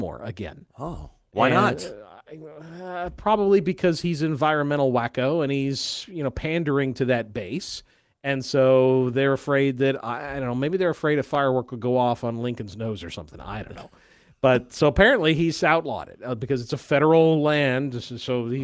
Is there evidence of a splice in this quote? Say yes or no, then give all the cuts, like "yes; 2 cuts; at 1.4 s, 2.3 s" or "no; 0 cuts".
no; 0 cuts